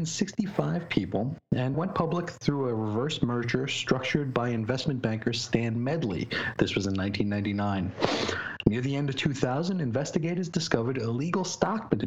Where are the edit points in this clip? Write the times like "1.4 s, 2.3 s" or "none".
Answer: 1.7 s